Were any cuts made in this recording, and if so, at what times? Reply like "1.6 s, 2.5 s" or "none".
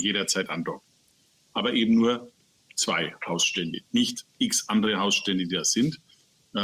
none